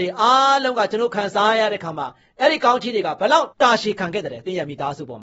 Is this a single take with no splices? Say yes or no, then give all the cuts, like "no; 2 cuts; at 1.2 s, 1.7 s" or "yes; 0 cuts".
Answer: no; 1 cut; at 3.5 s